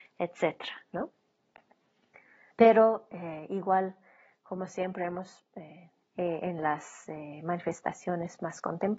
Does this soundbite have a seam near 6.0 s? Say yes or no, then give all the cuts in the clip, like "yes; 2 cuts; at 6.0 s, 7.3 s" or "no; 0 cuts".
yes; 2 cuts; at 2.5 s, 6.0 s